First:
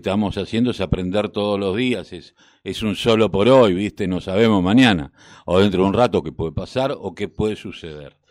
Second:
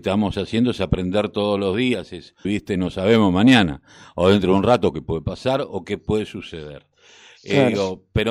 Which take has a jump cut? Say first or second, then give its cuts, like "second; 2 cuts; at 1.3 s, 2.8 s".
second; 1 cut; at 2.4 s